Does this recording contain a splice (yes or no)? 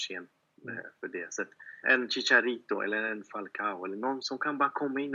yes